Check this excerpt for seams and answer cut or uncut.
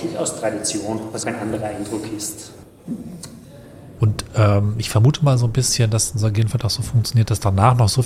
cut